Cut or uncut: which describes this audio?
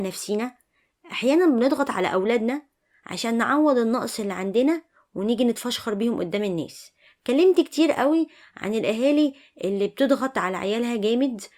uncut